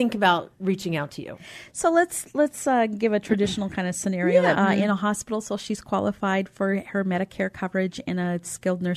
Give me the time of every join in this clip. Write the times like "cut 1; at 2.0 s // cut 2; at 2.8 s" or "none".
cut 1; at 4.5 s